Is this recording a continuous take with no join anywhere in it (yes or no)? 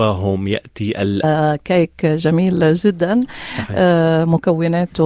no